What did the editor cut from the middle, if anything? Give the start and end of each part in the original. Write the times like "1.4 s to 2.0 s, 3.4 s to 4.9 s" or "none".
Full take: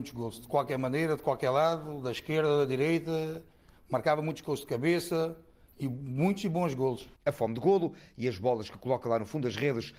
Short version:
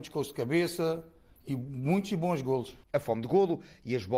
none